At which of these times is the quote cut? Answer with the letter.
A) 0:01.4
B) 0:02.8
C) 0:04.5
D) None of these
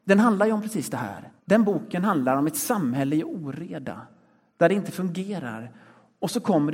A